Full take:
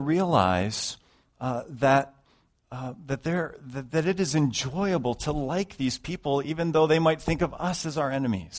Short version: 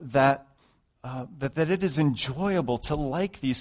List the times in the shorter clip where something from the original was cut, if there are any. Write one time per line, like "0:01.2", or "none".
0:01.5